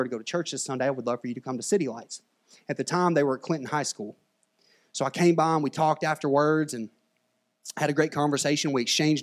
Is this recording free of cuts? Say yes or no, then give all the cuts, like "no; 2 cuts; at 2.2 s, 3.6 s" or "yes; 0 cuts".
yes; 0 cuts